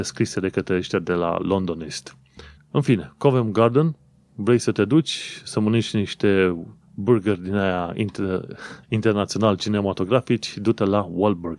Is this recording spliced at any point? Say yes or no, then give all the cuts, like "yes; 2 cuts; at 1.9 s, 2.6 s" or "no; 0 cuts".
yes; 3 cuts; at 2.6 s, 6.8 s, 8.8 s